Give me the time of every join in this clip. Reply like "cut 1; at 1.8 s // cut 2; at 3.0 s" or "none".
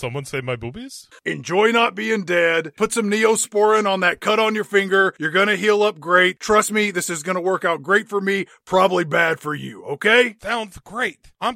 cut 1; at 1.2 s

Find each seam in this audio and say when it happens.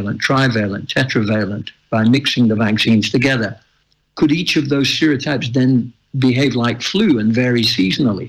cut 1; at 4.0 s

